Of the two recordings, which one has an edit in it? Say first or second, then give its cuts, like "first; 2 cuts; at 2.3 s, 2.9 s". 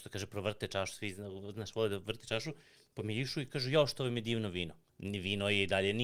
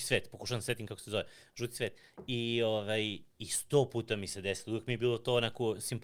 first; 1 cut; at 4.9 s